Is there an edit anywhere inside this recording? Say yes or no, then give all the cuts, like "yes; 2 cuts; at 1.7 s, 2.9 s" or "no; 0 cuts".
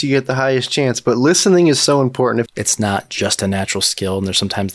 yes; 1 cut; at 2.5 s